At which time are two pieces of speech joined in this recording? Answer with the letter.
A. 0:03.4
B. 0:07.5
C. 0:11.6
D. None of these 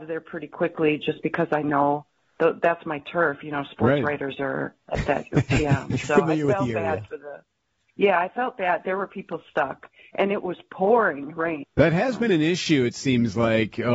C